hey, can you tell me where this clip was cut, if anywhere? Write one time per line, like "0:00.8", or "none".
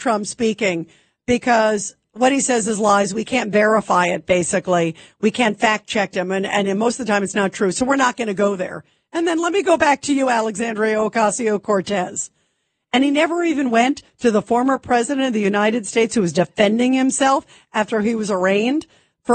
none